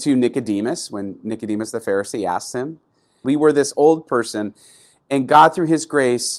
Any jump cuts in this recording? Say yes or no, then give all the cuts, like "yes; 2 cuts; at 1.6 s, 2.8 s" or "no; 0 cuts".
yes; 1 cut; at 3.2 s